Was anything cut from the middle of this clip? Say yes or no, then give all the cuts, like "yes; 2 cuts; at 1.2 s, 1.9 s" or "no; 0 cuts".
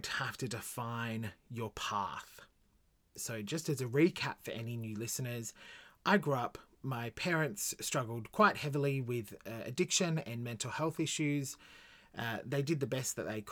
yes; 1 cut; at 3.2 s